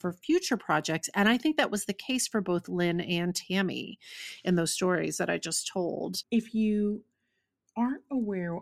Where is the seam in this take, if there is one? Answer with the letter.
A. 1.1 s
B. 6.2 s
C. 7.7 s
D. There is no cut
B